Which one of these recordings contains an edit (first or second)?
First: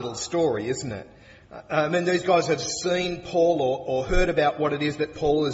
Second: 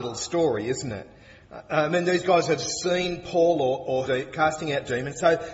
second